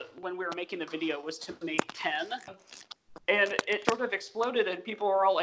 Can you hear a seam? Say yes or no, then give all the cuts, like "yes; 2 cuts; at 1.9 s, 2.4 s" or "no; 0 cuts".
yes; 2 cuts; at 2.5 s, 3.8 s